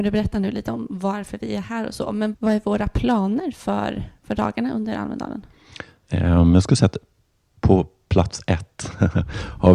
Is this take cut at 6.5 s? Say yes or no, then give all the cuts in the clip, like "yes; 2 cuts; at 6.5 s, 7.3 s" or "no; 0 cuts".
no; 1 cut; at 2.3 s